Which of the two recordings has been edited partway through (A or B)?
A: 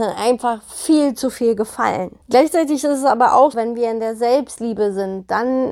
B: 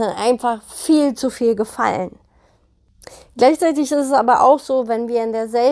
A